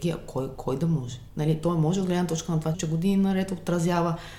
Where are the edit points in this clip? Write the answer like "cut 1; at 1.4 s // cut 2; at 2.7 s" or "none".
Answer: cut 1; at 1.3 s // cut 2; at 2.7 s

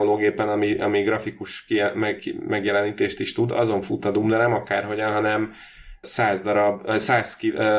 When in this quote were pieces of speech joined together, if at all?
cut 1; at 6.0 s

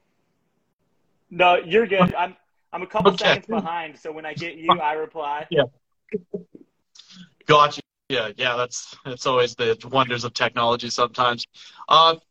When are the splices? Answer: none

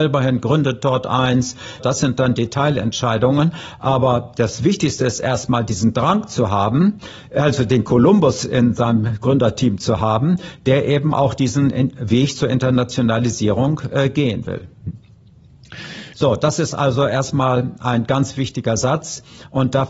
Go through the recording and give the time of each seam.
cut 1; at 1.8 s // cut 2; at 16.1 s

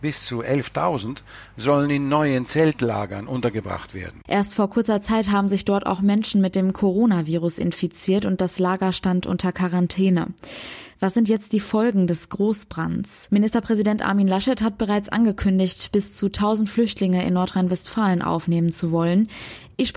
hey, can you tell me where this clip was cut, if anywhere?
cut 1; at 4.3 s

